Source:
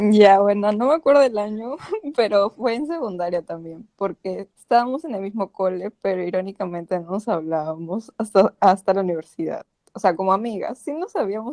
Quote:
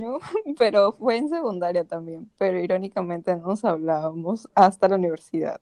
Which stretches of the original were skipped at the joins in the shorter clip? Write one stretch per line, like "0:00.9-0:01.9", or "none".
0:03.9-0:05.9
0:08.1-0:08.6